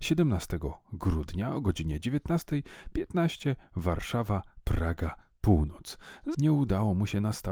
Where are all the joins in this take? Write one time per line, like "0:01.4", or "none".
0:06.3